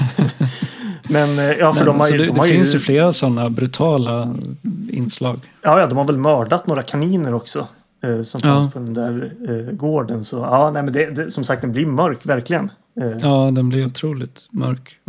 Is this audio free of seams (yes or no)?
yes